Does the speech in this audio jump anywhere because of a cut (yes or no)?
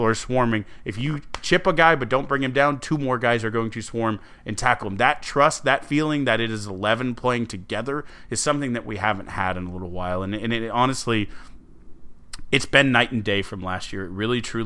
no